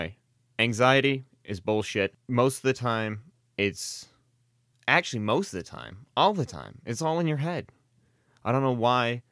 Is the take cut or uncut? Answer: uncut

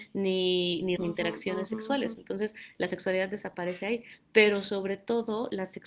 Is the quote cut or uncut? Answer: cut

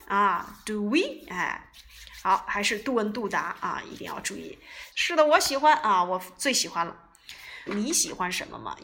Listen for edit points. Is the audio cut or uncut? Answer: cut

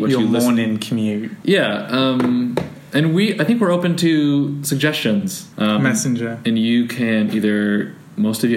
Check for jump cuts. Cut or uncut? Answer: cut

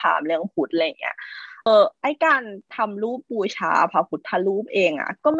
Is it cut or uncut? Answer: cut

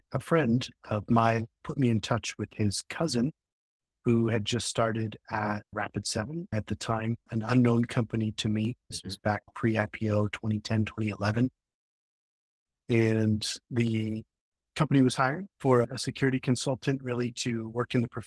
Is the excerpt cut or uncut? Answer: uncut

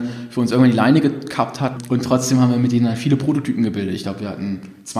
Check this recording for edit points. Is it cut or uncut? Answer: cut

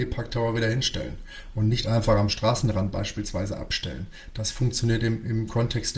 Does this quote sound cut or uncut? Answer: uncut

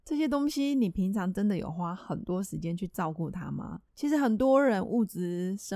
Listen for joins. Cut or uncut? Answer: cut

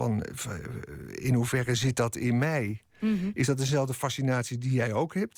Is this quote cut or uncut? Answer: uncut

